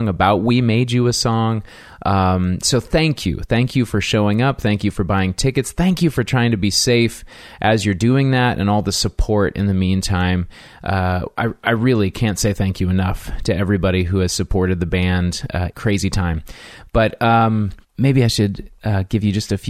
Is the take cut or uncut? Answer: cut